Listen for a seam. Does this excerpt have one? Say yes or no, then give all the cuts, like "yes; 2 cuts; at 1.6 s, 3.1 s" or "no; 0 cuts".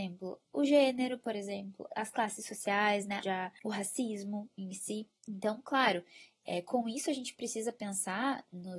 yes; 1 cut; at 3.2 s